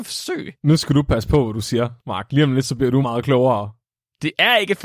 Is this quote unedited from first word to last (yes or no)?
no